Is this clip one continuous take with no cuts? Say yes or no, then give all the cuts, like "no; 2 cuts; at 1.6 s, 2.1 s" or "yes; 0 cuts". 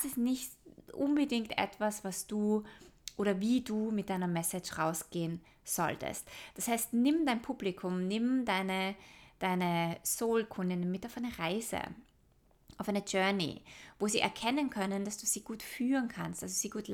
yes; 0 cuts